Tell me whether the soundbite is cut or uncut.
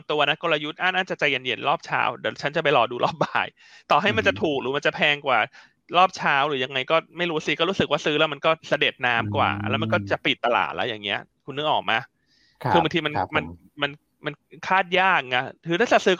cut